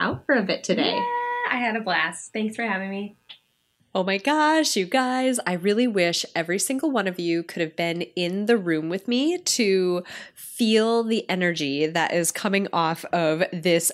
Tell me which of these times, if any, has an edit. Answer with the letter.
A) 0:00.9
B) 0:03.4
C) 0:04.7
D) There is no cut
D